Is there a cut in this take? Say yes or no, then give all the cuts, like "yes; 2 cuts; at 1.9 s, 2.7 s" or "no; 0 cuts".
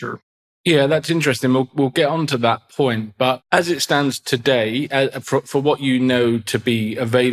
no; 0 cuts